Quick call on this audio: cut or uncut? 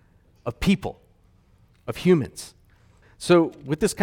cut